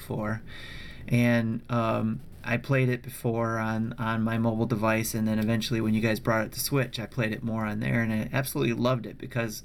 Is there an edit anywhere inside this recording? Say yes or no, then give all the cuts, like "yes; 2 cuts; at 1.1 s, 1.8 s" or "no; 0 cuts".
no; 0 cuts